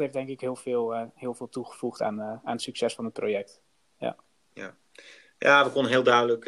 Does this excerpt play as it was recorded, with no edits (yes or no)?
yes